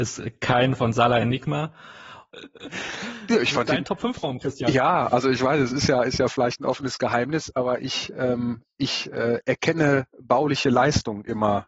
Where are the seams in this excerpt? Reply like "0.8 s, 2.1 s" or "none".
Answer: 2.3 s

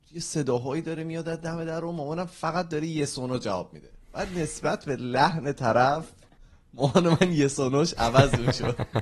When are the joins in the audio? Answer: none

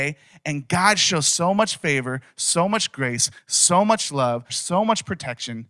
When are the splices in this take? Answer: 4.5 s

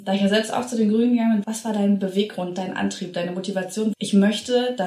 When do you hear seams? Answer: 1.4 s, 3.9 s

